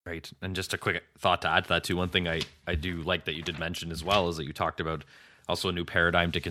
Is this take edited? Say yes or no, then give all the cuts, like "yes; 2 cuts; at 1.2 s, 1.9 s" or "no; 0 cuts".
no; 0 cuts